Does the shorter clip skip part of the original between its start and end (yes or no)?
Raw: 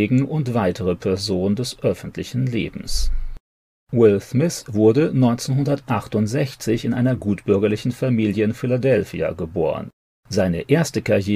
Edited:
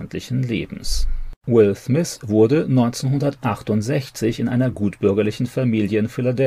yes